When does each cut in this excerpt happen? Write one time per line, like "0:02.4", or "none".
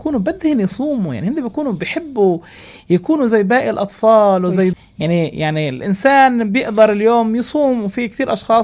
0:04.7